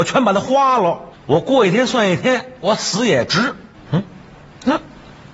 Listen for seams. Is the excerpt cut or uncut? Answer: cut